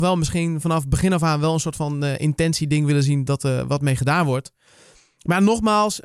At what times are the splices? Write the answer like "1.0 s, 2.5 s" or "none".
none